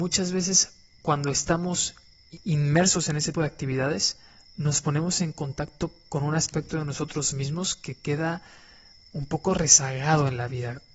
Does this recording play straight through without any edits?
no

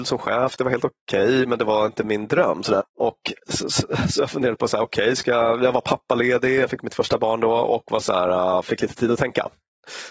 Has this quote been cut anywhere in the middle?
yes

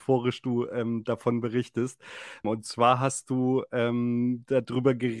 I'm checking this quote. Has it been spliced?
yes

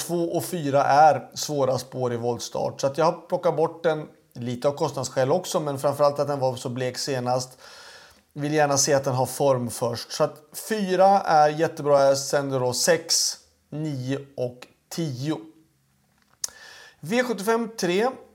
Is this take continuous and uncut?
yes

